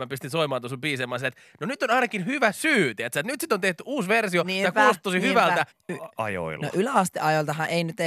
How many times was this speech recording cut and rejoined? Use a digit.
1